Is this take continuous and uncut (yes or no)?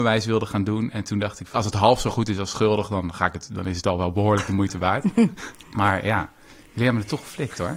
no